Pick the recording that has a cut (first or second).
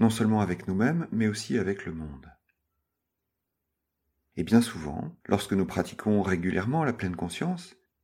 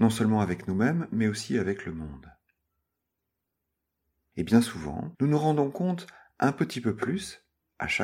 second